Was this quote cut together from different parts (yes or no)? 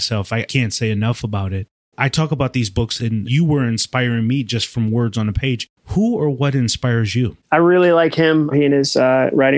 yes